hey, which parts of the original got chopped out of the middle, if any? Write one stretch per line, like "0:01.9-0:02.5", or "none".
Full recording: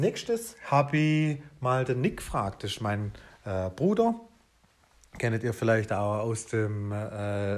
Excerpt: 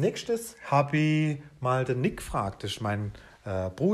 none